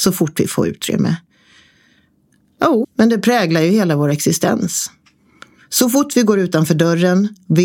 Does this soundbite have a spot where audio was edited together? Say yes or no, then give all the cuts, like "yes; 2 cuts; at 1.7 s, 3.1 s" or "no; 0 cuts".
yes; 1 cut; at 2.8 s